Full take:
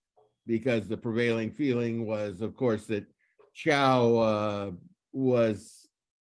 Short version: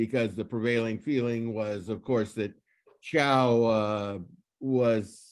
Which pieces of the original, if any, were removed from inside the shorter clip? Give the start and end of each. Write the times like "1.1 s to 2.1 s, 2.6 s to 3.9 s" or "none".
none